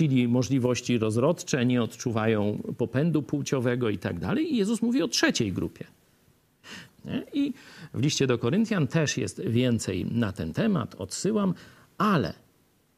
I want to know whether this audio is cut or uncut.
cut